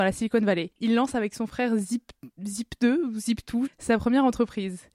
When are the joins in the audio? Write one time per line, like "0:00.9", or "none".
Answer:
0:03.7